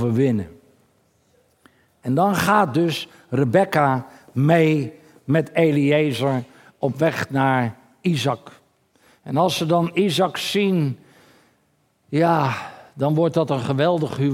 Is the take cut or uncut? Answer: uncut